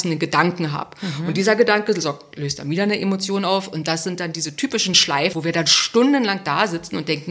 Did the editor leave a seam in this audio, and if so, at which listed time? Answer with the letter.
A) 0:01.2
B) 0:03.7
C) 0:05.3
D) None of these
C